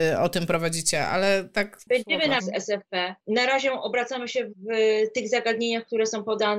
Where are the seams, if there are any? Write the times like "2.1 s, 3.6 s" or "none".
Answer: 2.4 s, 4.5 s